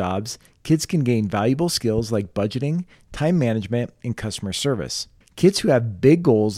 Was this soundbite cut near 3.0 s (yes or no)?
no